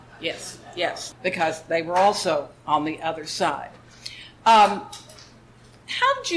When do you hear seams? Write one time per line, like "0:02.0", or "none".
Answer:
0:01.1